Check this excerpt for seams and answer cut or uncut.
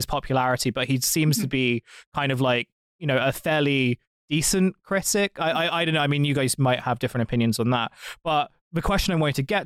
uncut